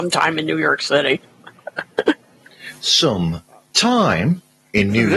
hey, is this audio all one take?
yes; 0 cuts

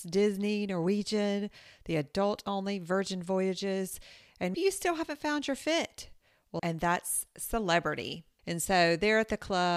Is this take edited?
yes; 3 cuts; at 4.5 s, 6.6 s, 8.4 s

